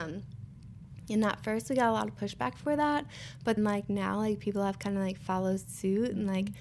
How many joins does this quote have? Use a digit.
1